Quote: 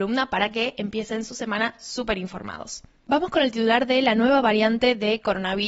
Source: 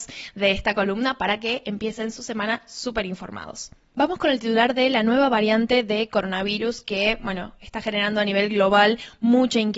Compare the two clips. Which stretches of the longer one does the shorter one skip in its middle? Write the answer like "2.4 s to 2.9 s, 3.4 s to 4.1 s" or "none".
none